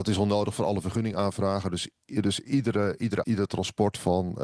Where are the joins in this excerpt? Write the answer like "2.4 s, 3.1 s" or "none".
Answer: 3.2 s